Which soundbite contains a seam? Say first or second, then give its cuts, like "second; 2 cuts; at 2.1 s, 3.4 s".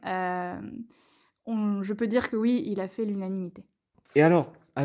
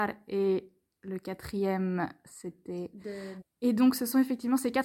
second; 1 cut; at 3.4 s